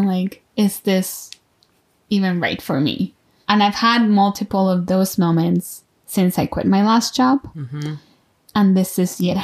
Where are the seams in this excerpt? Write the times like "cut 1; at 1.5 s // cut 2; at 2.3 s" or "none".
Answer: none